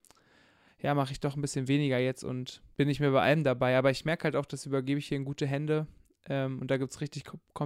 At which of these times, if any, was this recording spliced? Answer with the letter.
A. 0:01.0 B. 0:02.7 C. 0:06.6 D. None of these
B